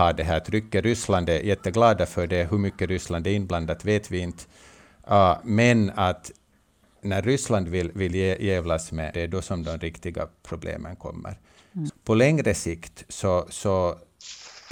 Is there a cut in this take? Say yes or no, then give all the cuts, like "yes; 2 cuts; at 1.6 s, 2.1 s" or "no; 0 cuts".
yes; 2 cuts; at 9.1 s, 11.9 s